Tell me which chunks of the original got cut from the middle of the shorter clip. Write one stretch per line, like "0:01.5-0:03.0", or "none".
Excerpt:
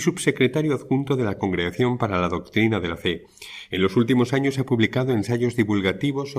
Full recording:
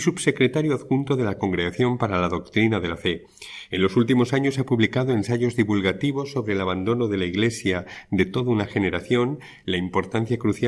none